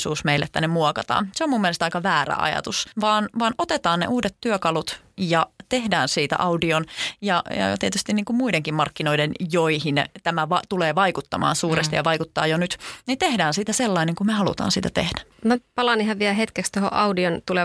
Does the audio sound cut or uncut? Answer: uncut